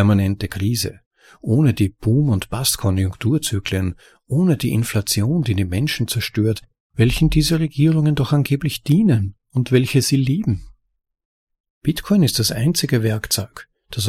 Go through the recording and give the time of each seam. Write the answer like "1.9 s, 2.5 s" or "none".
none